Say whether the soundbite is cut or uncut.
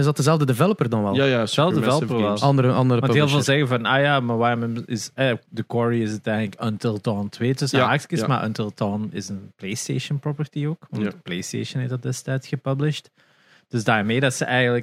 uncut